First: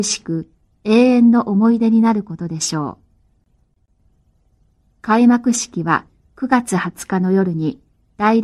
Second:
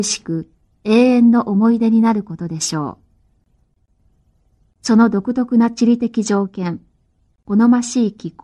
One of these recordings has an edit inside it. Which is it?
second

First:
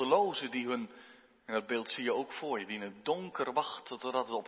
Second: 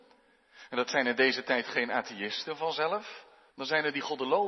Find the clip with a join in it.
second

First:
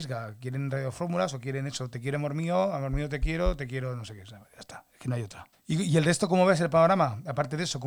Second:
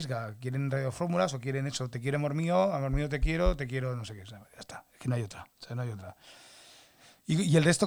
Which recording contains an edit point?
first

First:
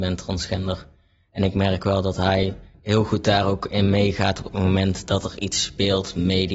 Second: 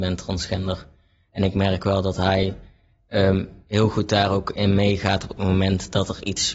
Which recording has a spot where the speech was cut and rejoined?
first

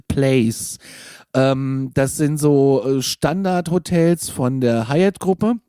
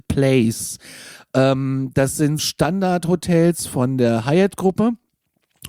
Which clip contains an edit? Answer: second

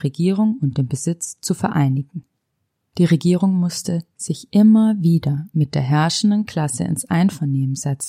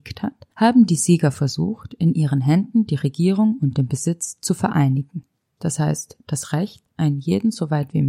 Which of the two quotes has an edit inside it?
second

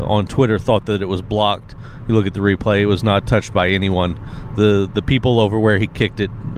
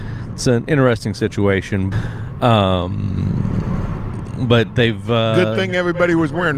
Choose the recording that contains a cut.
second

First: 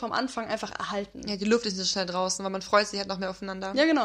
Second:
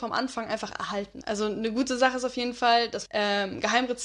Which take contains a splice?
second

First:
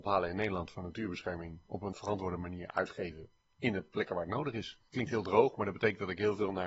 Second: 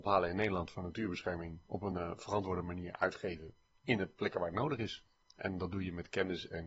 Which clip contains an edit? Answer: first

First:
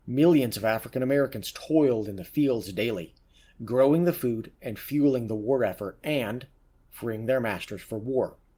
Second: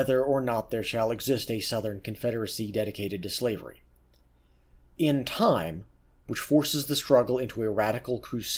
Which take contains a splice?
second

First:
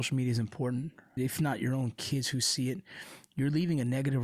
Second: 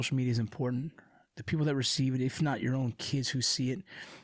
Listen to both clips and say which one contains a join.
first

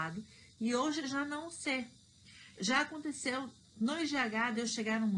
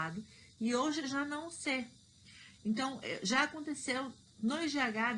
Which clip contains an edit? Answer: first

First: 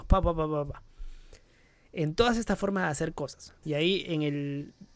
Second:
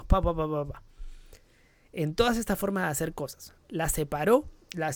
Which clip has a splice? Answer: first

